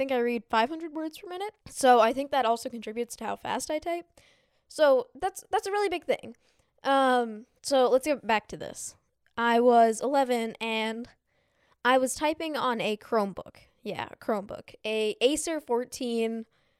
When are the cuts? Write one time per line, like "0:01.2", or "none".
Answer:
0:01.6